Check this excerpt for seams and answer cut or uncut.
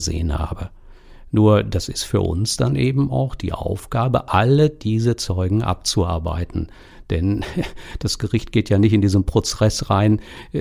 uncut